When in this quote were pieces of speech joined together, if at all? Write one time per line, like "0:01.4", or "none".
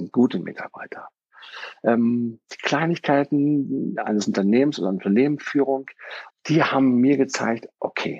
0:06.3